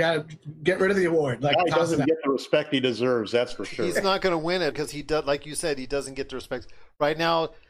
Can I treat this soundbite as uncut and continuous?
no; 1 cut; at 4.7 s

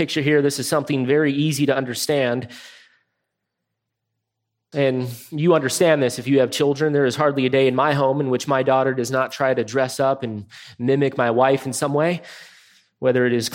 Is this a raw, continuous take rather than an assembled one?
no; 1 cut; at 4.7 s

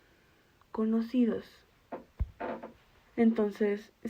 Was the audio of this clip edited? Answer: yes; 1 cut; at 3.1 s

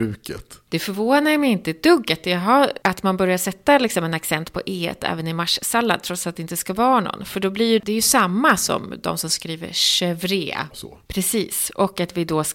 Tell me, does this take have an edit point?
yes; 2 cuts; at 7.8 s, 10.7 s

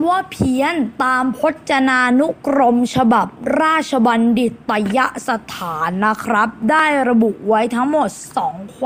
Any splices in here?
no; 0 cuts

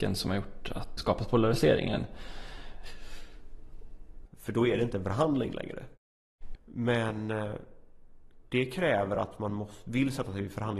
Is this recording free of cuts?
no; 3 cuts; at 1.0 s, 4.3 s, 6.6 s

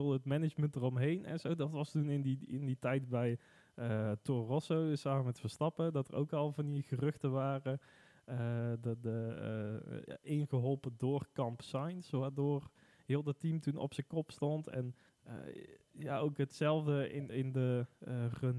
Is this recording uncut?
no; 2 cuts; at 10.1 s, 17.3 s

